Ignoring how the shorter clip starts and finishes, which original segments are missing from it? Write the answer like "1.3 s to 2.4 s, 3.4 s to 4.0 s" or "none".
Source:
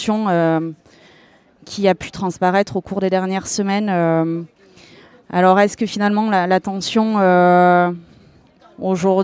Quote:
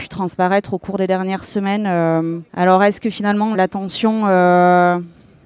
4.5 s to 5.2 s, 6.3 s to 6.5 s